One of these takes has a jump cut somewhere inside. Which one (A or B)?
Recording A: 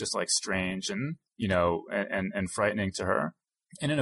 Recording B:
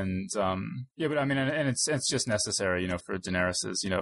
B